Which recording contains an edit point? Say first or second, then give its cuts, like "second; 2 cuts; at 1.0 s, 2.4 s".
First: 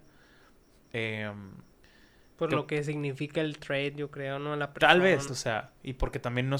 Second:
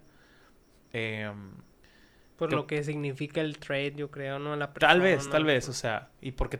first; 1 cut; at 5.3 s